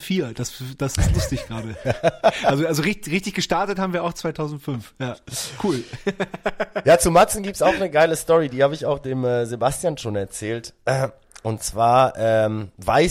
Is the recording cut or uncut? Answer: uncut